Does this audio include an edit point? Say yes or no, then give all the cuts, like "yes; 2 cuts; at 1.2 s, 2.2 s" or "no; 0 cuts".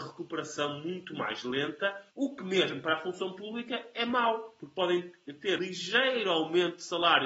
yes; 2 cuts; at 2.1 s, 5.6 s